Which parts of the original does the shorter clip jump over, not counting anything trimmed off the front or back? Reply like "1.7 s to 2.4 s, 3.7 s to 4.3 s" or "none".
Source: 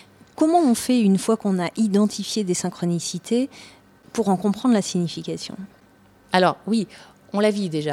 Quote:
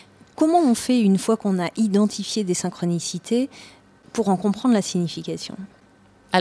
none